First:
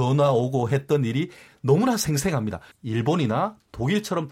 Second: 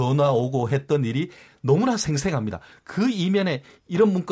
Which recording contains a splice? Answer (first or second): first